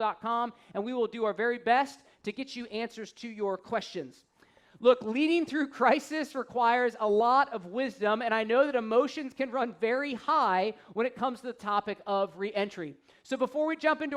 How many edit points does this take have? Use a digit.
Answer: 0